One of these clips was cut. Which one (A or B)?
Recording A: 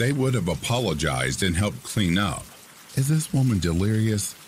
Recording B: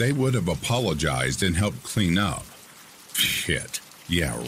A